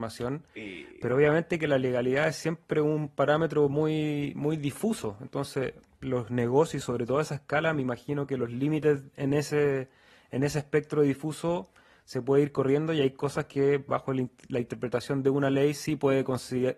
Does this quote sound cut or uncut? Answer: uncut